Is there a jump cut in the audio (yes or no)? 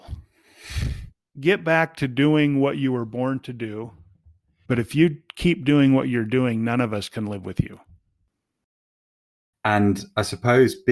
yes